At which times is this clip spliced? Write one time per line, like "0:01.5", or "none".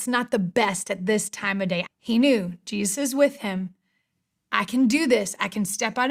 0:01.8
0:04.5